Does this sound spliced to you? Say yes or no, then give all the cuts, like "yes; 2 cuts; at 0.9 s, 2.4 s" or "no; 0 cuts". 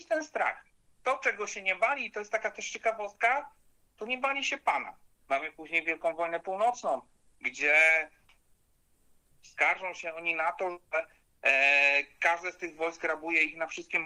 yes; 1 cut; at 5.2 s